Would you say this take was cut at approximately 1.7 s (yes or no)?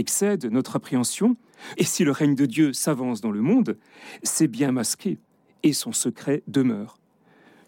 yes